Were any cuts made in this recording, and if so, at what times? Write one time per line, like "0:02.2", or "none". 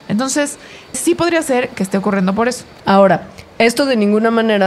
0:00.9
0:02.8